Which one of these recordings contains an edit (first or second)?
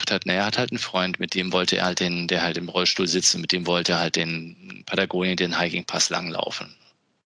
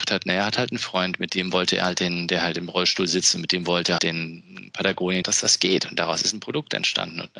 second